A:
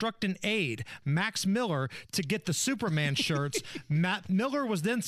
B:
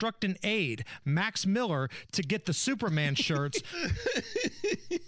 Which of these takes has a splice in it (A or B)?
B